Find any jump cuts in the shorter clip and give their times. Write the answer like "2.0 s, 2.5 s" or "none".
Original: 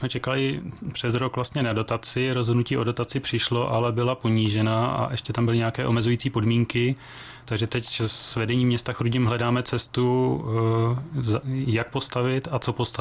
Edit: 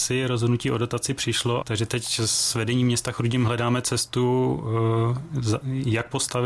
1.6 s